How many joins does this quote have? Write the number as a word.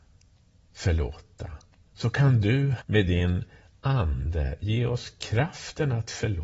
one